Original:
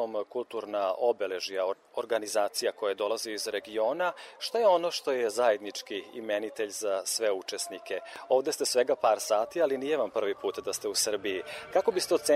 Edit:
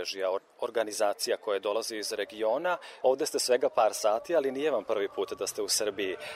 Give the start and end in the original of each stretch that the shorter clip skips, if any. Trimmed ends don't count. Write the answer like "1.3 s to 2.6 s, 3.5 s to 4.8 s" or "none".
4.4 s to 8.3 s